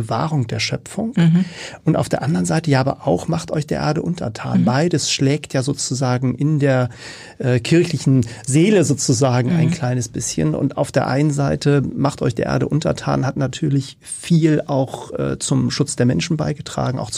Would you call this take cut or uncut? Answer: uncut